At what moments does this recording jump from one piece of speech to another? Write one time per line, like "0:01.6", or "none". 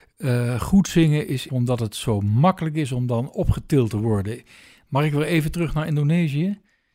0:01.5